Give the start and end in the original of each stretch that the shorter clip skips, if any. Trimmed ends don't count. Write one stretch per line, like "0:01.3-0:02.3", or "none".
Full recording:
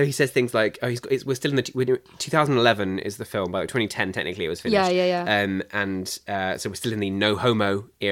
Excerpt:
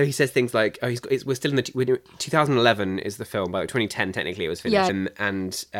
0:04.9-0:05.4